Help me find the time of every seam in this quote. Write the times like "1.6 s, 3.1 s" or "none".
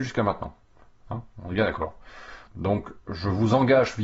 2.5 s